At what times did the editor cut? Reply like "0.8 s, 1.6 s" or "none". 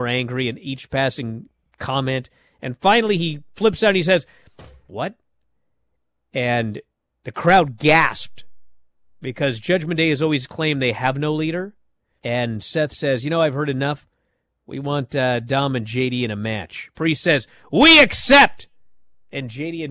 4.9 s, 12.2 s